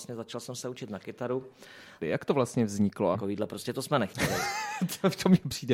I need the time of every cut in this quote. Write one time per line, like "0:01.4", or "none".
0:02.0
0:03.1